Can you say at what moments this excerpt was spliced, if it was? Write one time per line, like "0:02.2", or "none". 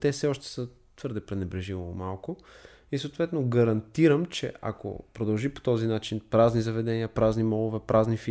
none